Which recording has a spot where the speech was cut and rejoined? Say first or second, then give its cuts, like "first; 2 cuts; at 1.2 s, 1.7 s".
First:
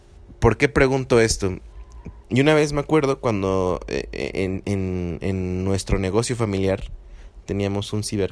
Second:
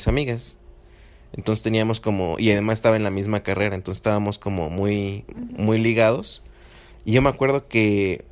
first; 2 cuts; at 2.2 s, 5.2 s